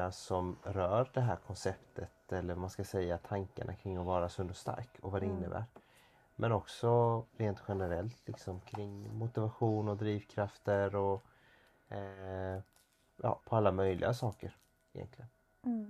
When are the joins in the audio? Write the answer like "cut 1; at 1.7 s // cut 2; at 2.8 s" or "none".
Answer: cut 1; at 7.3 s // cut 2; at 13.4 s